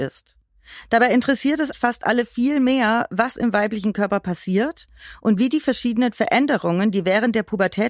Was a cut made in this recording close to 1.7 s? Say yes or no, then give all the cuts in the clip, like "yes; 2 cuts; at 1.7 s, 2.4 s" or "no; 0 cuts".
yes; 1 cut; at 1.7 s